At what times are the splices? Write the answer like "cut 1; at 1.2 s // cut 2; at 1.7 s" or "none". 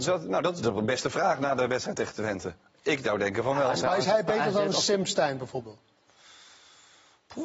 cut 1; at 3.8 s